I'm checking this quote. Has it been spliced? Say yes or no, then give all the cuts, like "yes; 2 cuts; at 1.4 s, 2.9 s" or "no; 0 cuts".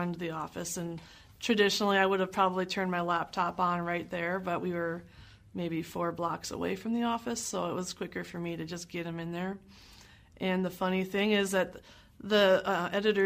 no; 0 cuts